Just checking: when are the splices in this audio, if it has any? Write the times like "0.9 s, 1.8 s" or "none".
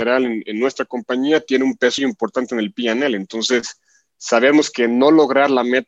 2.0 s